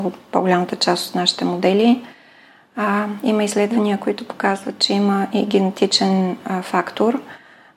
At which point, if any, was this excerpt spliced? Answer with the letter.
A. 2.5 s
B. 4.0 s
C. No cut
C